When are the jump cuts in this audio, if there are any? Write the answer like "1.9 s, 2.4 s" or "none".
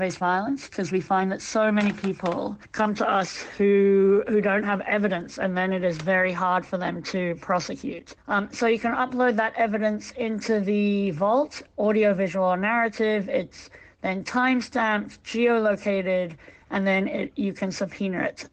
none